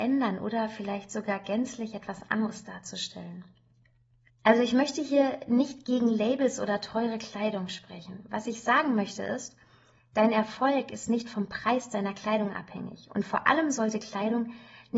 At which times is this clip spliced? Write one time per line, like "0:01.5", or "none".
0:04.3